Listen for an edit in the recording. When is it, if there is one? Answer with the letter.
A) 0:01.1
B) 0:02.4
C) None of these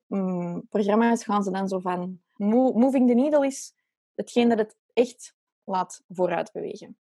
B